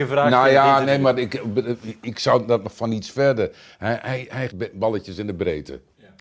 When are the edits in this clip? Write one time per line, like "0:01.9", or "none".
0:04.5